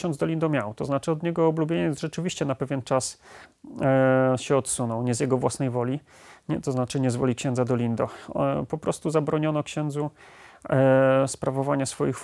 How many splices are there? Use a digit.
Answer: 0